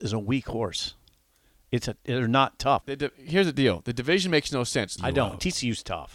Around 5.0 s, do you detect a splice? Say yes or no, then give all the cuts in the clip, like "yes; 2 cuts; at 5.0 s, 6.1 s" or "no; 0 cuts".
yes; 2 cuts; at 2.8 s, 5.0 s